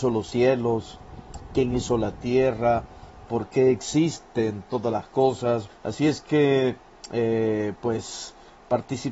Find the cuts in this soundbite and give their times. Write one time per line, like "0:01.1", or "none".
0:05.7